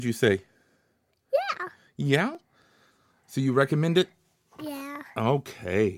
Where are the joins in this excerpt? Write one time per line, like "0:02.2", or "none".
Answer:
none